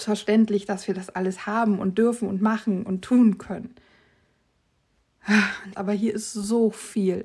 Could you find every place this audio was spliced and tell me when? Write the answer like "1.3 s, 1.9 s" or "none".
5.7 s